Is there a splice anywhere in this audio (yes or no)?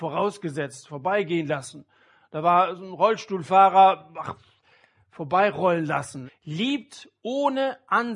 yes